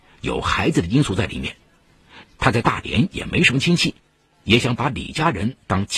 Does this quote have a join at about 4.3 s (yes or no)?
no